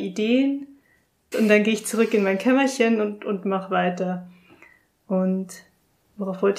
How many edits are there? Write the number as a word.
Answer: one